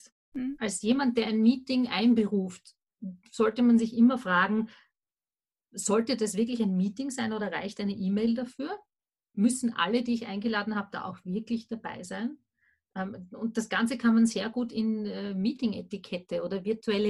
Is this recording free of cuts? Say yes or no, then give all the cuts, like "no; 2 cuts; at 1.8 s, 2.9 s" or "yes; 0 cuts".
yes; 0 cuts